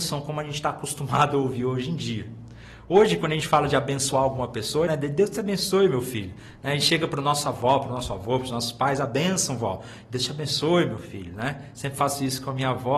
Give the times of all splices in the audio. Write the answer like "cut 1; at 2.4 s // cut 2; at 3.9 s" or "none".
cut 1; at 4.9 s